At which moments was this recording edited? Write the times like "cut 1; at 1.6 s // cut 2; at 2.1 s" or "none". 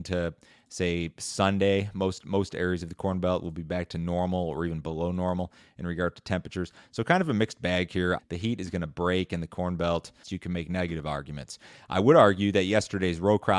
cut 1; at 8.2 s // cut 2; at 10.2 s